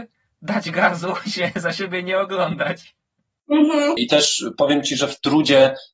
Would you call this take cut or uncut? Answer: cut